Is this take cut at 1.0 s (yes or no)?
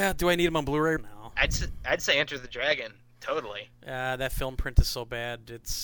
yes